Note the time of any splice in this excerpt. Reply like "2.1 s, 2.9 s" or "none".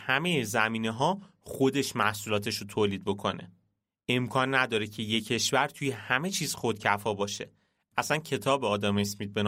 7.9 s